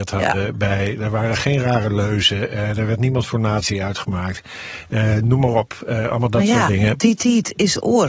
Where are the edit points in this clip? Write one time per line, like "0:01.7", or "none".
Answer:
none